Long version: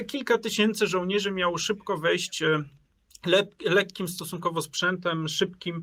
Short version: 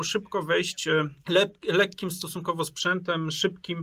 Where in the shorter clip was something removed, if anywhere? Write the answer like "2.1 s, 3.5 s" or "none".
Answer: 1.2 s

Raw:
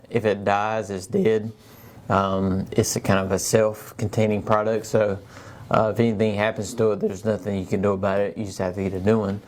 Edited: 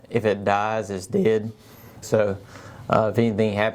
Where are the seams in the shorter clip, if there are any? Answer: 2.0 s

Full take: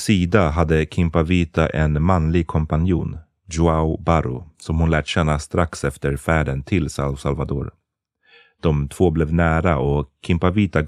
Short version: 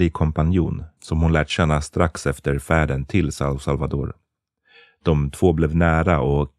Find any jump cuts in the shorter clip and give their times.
1.0 s

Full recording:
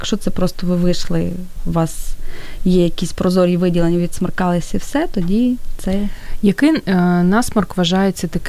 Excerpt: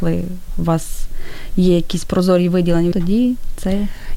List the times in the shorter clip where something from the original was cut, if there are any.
2.9 s

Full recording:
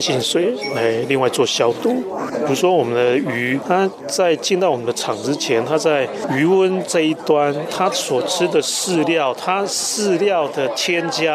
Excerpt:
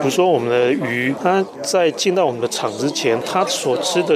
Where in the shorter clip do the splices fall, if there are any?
3.2 s

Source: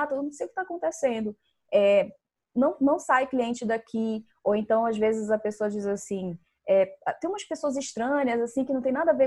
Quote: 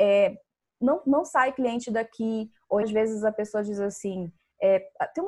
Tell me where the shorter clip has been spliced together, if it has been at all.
2.8 s

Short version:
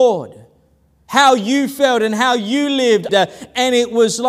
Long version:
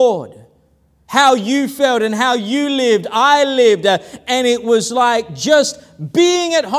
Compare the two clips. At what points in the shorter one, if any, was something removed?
3.1 s

